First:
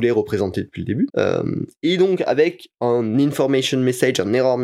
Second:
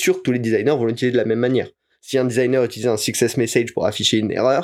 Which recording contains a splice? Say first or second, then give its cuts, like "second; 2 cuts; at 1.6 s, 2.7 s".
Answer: first; 1 cut; at 1.1 s